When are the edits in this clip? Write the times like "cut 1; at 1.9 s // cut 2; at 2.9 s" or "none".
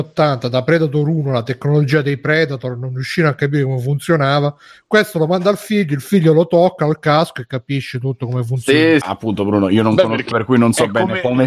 cut 1; at 9.0 s // cut 2; at 10.3 s